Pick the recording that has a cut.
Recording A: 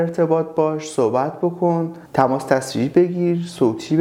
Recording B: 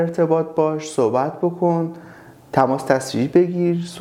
A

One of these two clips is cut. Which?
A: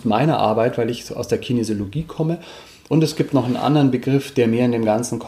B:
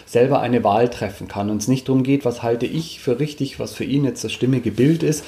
A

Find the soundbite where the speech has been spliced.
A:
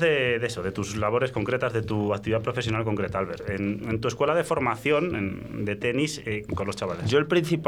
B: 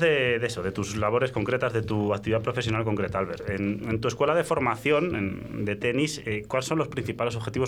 A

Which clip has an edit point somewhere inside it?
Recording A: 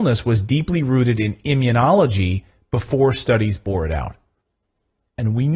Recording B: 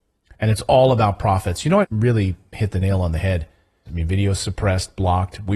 B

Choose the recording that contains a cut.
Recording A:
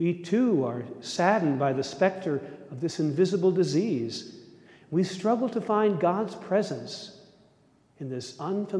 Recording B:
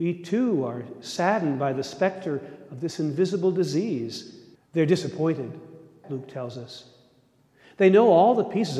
B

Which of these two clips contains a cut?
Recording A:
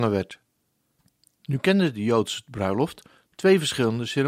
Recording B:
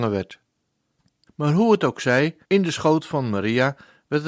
B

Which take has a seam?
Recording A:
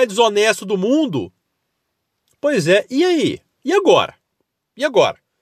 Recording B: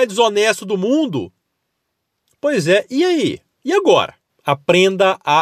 B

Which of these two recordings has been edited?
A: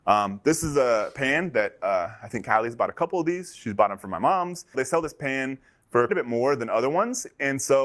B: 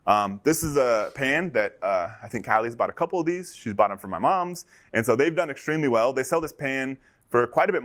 A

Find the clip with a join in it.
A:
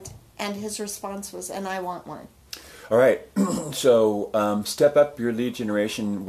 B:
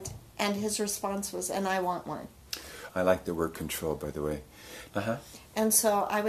B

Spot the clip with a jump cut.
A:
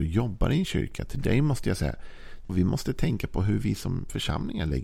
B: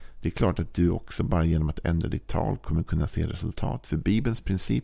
A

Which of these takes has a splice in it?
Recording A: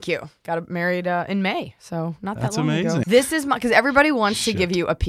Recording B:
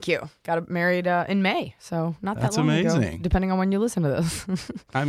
A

